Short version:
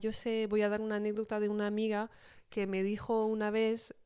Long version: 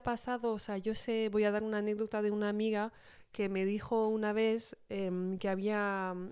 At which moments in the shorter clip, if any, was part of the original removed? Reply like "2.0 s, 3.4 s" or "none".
none